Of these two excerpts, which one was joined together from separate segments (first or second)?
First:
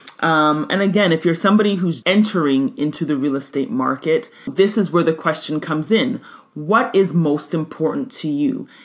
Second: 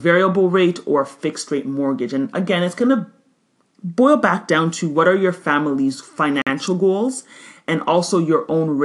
first